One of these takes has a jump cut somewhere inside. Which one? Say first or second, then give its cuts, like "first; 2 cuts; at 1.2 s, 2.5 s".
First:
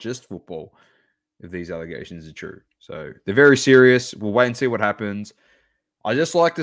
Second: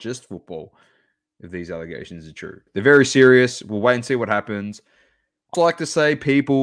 second; 2 cuts; at 2.7 s, 5.5 s